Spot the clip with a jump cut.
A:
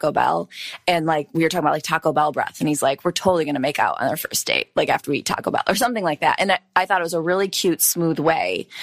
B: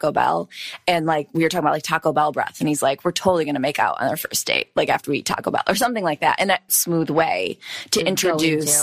B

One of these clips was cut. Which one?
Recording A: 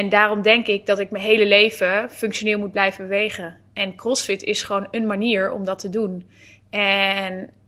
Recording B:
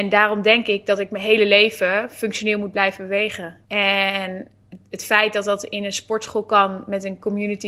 B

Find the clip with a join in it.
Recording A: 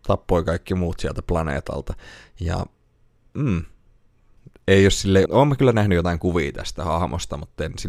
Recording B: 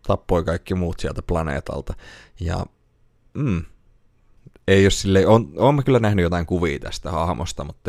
A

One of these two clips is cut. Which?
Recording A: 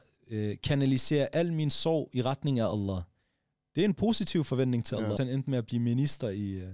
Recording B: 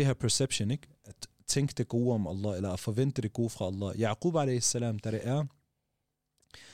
A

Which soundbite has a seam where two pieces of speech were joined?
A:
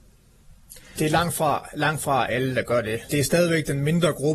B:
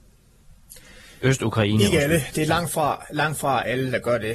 A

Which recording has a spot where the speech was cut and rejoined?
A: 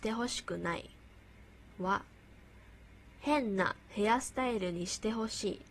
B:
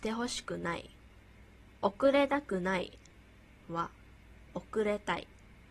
B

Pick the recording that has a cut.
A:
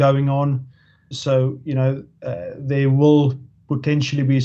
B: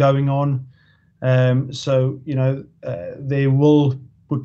A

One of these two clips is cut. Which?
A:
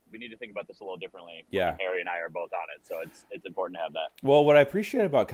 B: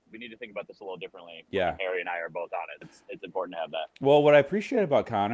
B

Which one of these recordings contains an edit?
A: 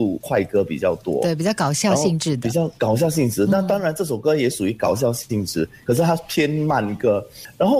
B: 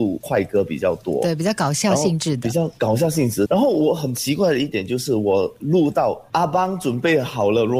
B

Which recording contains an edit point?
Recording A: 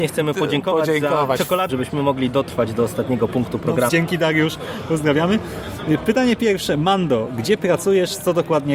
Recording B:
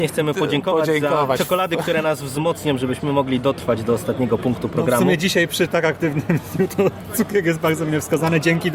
A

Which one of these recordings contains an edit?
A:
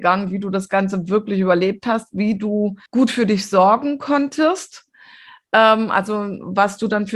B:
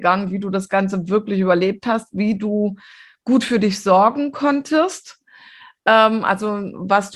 A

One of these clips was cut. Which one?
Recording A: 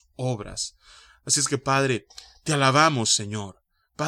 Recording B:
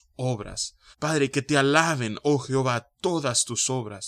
B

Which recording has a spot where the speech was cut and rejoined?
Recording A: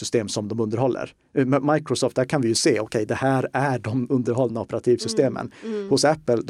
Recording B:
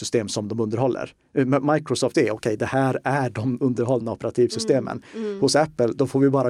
B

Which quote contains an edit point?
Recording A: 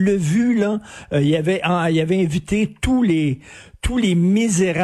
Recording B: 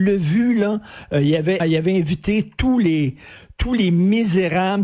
B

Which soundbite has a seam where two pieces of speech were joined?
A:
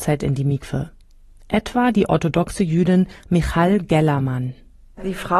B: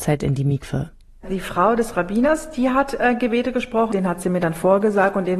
B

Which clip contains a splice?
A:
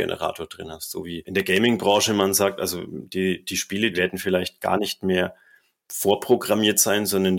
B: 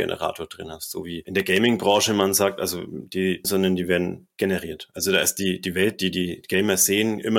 B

